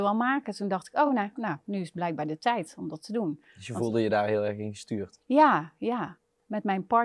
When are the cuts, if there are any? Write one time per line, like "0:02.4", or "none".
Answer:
none

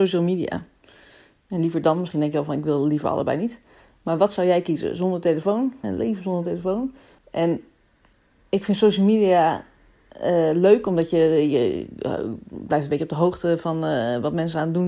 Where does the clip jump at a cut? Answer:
0:05.8
0:07.2

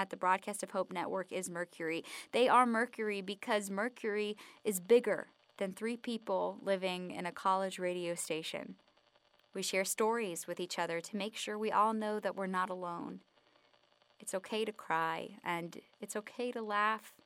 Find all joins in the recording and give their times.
0:09.4

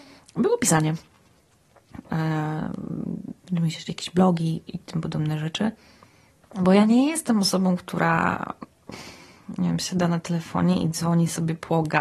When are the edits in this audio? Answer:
0:02.0
0:03.4
0:06.4

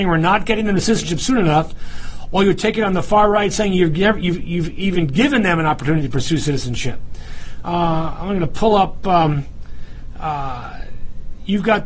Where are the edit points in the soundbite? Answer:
0:07.6

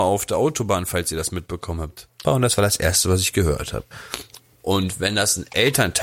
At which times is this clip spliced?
0:02.2

